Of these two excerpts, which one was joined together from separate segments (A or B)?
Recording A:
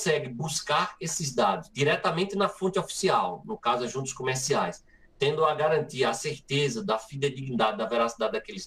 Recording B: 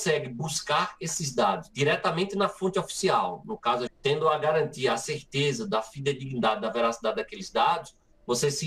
B